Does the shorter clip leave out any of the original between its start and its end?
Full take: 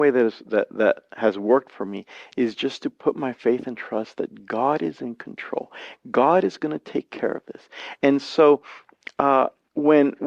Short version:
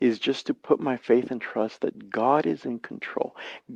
no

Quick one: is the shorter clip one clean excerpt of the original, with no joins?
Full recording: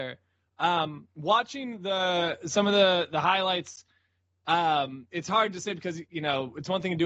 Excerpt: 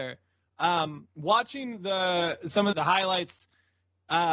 no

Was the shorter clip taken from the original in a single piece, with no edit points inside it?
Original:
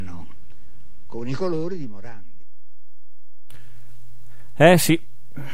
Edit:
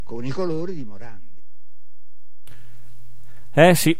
yes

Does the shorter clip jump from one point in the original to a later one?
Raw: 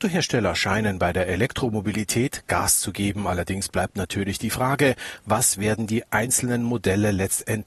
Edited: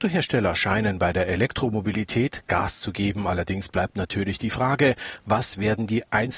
no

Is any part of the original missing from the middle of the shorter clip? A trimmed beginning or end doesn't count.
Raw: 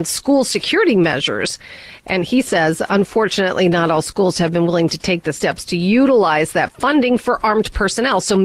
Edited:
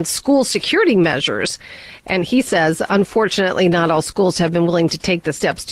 no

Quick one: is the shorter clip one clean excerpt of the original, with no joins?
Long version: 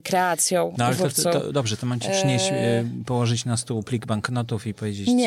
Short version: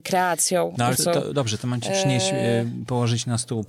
no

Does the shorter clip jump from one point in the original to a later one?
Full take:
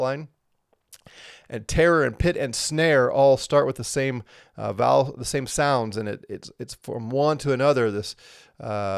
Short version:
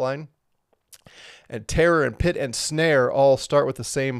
no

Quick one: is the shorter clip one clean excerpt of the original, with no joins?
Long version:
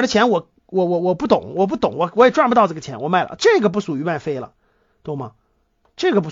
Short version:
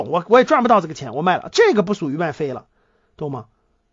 yes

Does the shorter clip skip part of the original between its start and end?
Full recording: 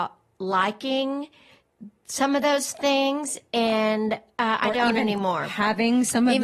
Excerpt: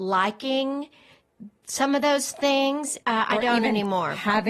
yes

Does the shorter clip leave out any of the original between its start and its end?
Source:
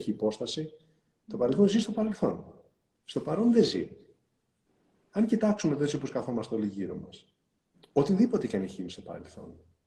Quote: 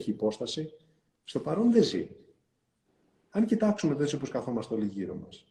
yes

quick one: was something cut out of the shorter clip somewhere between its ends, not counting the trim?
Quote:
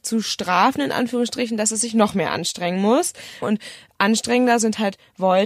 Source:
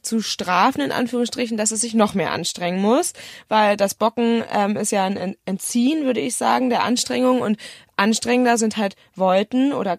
yes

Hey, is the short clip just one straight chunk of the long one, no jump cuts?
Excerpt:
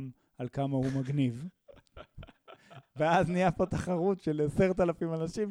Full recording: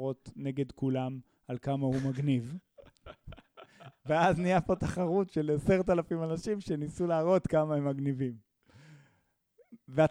yes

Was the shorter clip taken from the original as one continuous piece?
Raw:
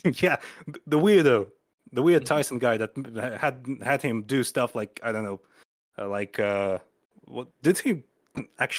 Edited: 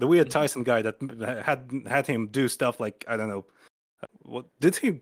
no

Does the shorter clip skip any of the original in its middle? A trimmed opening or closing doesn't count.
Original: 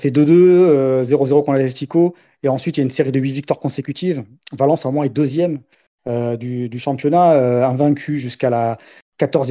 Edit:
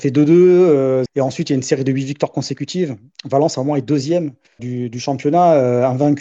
yes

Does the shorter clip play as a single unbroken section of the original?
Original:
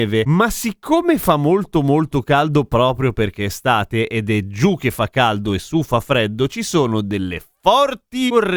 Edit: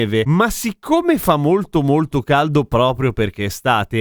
yes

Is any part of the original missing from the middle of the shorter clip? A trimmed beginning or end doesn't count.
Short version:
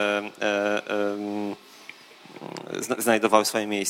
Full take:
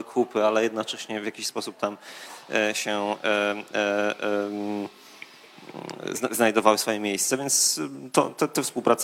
no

